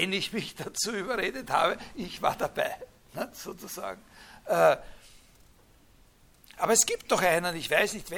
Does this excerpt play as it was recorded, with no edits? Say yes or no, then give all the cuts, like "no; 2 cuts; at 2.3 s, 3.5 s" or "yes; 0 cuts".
yes; 0 cuts